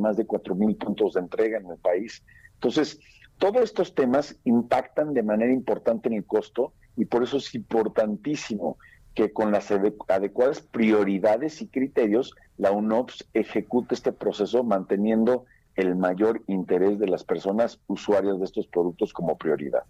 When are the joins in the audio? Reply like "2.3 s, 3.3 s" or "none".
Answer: none